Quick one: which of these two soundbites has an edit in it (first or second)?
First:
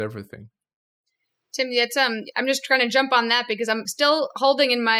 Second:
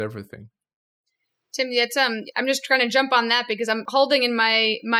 second